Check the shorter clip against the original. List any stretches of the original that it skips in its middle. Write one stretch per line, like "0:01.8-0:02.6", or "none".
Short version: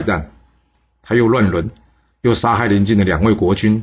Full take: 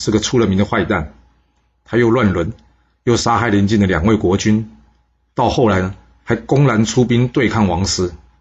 none